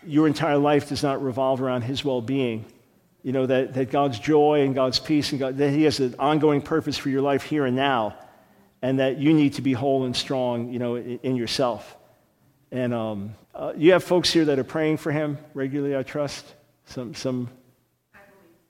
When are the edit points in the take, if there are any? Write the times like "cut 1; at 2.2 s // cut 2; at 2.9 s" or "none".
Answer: cut 1; at 13.4 s